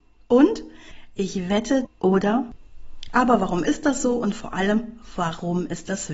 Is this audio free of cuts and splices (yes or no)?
no